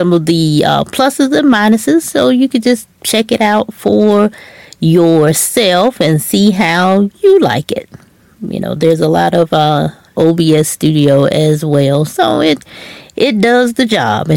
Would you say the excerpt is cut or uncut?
cut